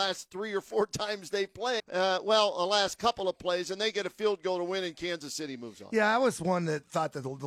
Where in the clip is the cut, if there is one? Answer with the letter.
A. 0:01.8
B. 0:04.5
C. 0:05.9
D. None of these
A